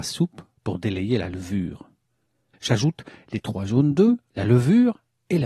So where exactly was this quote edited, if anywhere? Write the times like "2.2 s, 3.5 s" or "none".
2.5 s, 4.3 s